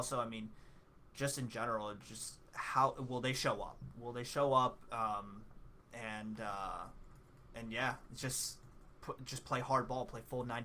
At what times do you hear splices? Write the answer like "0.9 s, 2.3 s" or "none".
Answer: none